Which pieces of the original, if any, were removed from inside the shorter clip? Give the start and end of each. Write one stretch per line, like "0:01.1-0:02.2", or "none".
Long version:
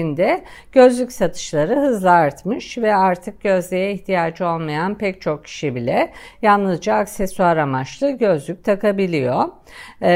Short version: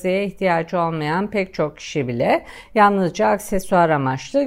none